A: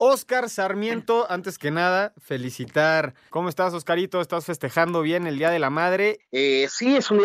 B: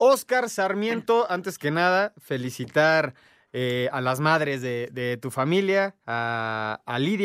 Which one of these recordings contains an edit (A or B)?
A